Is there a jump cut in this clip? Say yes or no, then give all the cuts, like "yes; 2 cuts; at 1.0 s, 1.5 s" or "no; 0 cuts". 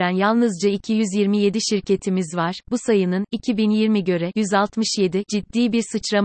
no; 0 cuts